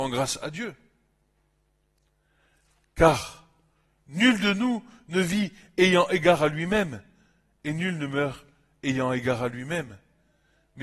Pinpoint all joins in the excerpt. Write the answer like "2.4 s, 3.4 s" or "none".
none